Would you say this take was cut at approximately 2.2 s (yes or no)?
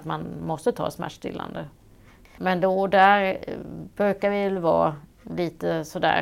yes